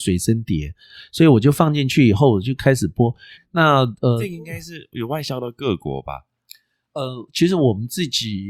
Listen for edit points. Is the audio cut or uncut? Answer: cut